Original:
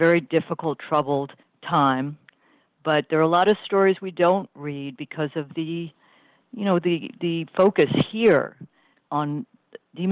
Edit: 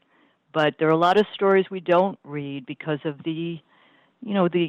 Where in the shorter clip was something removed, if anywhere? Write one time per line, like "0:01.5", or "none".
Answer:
none